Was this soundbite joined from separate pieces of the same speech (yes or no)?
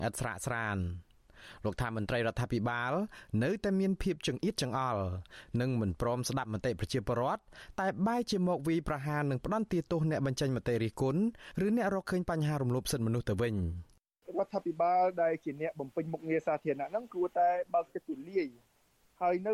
no